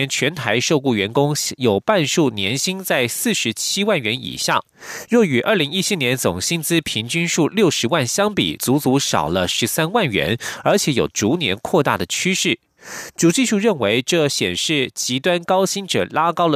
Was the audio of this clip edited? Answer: no; 0 cuts

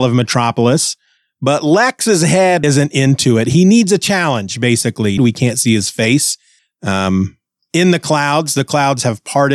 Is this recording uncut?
no; 2 cuts; at 2.6 s, 5.2 s

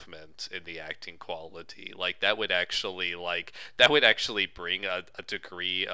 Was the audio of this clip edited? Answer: no; 0 cuts

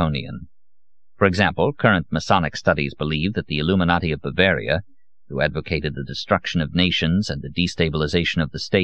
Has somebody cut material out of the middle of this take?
no; 0 cuts

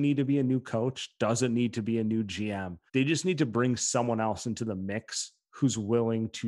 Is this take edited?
yes; 1 cut; at 2.9 s

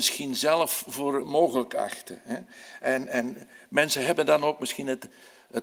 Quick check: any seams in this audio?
yes; 1 cut; at 1.2 s

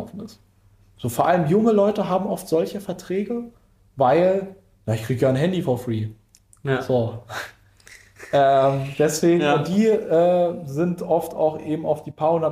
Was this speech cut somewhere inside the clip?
no; 0 cuts

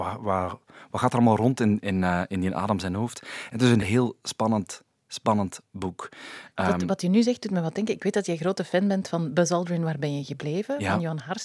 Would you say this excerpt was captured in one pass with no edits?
no; 1 cut; at 3.8 s

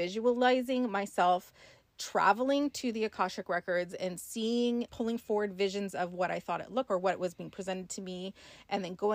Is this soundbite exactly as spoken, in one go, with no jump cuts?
no; 2 cuts; at 4.9 s, 6.9 s

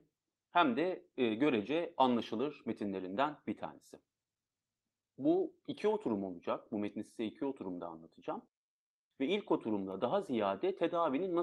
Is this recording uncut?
yes; 0 cuts

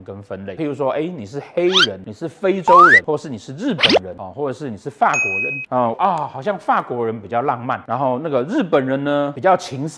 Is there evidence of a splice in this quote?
yes; 1 cut; at 5.9 s

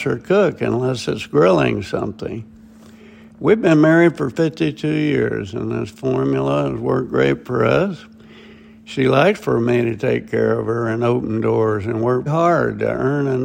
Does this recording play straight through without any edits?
no; 1 cut; at 12.3 s

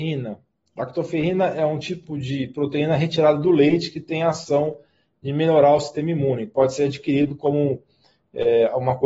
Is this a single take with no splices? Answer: yes; 0 cuts

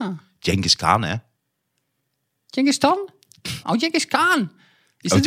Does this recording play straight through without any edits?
no; 1 cut; at 3.6 s

